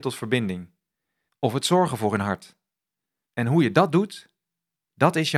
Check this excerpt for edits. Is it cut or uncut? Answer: cut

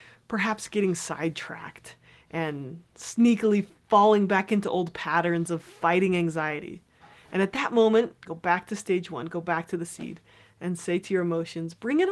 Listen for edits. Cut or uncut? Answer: cut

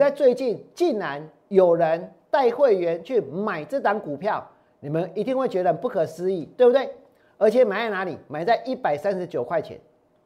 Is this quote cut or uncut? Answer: uncut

